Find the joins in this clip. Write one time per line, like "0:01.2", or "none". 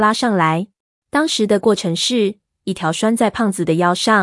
0:00.9
0:02.5